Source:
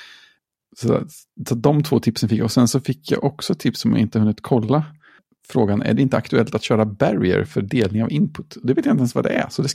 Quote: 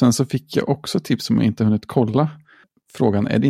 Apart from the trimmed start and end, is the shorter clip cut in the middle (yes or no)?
no